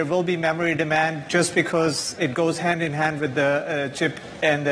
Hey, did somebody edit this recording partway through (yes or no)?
yes